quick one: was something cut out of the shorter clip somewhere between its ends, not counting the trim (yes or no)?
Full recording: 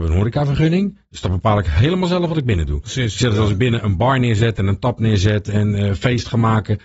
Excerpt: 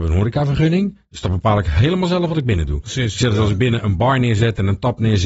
no